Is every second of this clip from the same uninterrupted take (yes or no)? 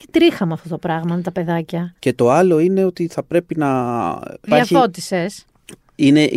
no